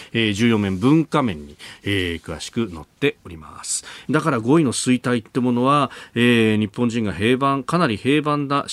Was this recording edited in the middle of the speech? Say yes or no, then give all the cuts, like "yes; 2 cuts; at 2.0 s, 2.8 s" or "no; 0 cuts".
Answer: yes; 1 cut; at 4.0 s